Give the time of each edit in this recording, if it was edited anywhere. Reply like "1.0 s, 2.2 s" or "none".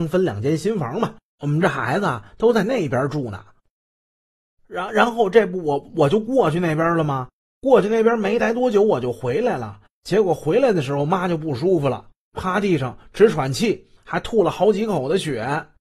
none